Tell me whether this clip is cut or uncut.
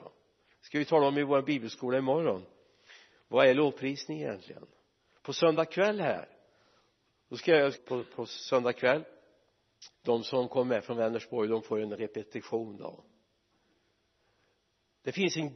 cut